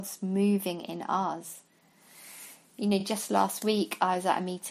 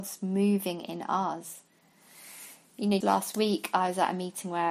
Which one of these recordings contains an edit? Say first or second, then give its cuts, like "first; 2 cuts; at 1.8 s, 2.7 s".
second; 1 cut; at 3.0 s